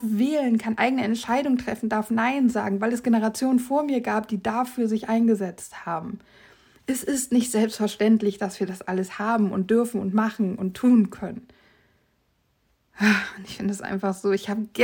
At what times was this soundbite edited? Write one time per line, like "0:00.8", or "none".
none